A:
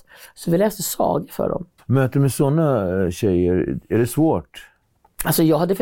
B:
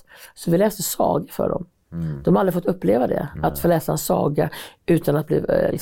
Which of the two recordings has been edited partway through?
A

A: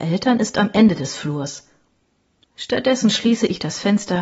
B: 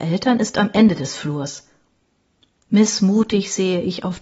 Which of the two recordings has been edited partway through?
A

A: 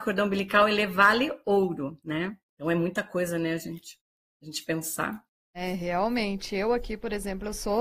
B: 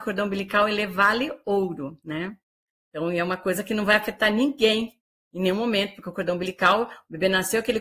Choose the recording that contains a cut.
A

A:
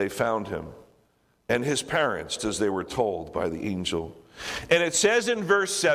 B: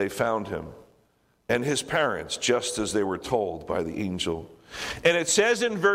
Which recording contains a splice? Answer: A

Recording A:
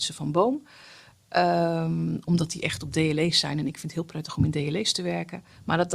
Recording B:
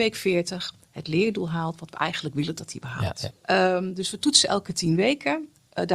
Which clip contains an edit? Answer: B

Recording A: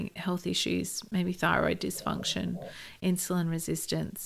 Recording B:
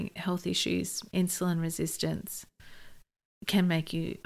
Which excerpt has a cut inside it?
B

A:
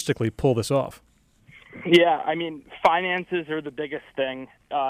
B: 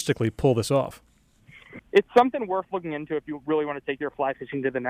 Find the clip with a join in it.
B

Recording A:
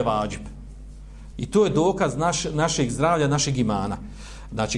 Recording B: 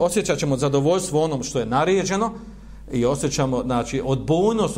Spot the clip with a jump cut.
A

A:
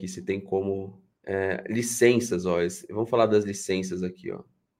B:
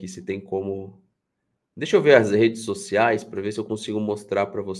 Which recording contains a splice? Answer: A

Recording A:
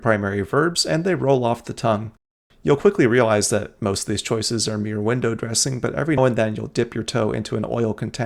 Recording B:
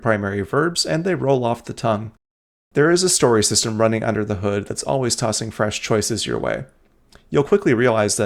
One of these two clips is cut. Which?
A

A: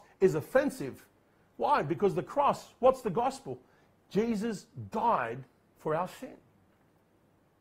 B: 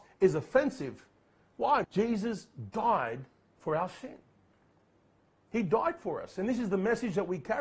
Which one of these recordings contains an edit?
B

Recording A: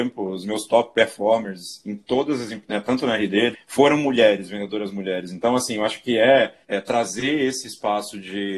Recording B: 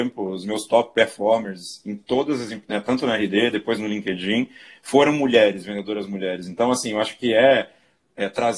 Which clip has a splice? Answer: A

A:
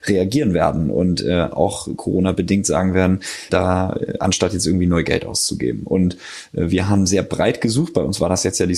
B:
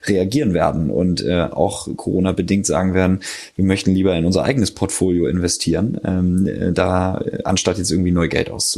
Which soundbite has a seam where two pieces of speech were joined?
A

